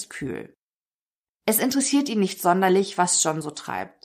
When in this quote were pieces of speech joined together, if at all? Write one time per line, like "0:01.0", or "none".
0:01.3